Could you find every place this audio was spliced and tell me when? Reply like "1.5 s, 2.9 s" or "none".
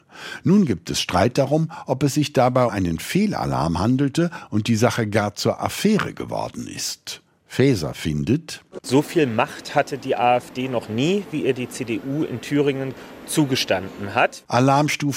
2.7 s, 8.8 s